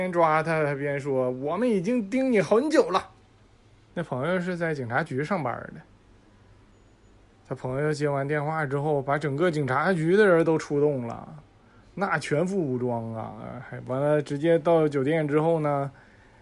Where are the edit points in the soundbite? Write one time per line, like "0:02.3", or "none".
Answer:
0:03.9